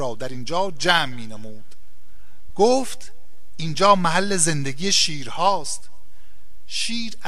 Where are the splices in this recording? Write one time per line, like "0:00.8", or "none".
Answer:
0:02.5

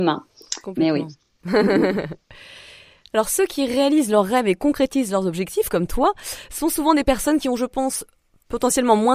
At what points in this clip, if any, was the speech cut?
none

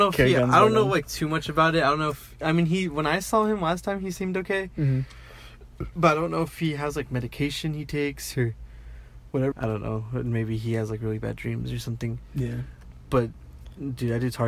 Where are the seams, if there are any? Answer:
0:09.5

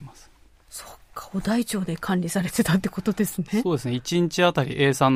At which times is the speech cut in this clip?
none

